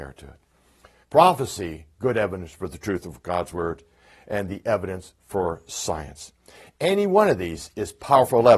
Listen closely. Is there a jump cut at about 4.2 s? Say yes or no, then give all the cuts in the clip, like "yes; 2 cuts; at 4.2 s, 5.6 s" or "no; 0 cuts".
no; 1 cut; at 1.0 s